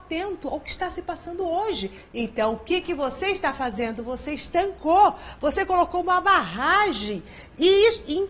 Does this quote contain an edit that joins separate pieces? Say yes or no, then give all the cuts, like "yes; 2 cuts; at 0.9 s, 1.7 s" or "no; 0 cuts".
yes; 1 cut; at 2.1 s